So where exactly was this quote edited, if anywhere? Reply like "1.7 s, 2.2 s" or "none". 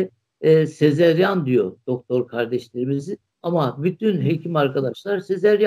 3.3 s